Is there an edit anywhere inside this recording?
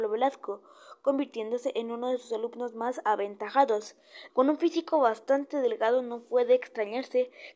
yes; 1 cut; at 4.3 s

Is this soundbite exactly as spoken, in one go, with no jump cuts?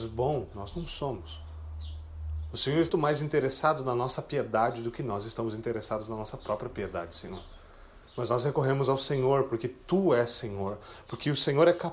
no; 1 cut; at 2.9 s

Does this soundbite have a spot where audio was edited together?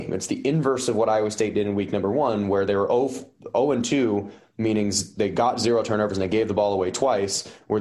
no; 0 cuts

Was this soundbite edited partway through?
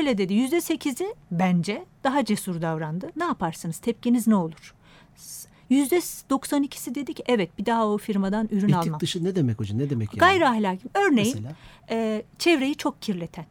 yes; 2 cuts; at 3.1 s, 5.5 s

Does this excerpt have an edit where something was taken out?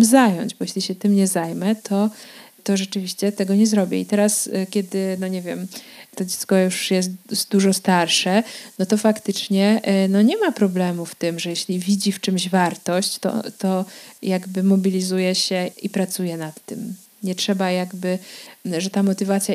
yes; 1 cut; at 15.7 s

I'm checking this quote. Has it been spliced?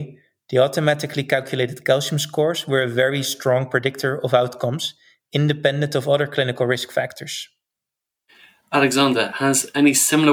no; 0 cuts

